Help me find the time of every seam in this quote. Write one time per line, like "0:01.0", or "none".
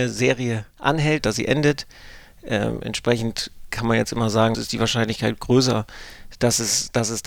0:01.2
0:04.5

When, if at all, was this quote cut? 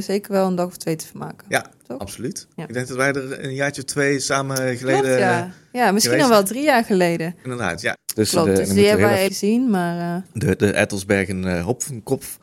0:08.0
0:09.3

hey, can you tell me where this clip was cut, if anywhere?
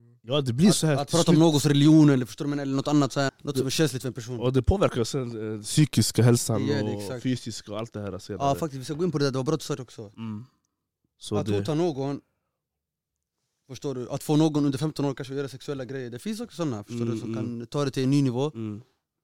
0:03.3

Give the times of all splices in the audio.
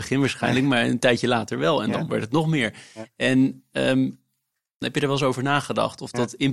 0:04.8

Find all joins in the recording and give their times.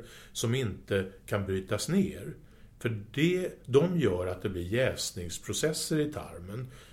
none

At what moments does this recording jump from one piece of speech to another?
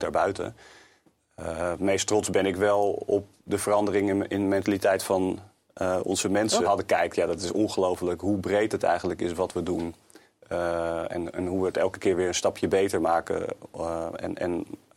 0:06.7

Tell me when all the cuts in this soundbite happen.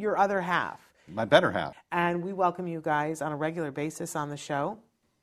0:01.7

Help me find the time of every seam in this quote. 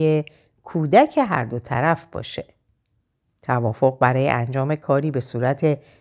none

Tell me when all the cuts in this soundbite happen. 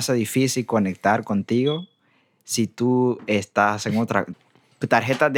0:04.3

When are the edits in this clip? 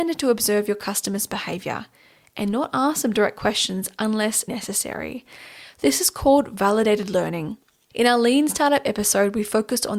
0:04.5
0:07.9

